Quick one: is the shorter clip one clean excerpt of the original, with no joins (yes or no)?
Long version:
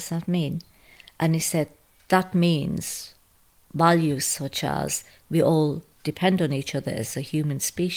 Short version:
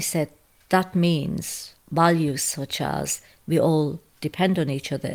no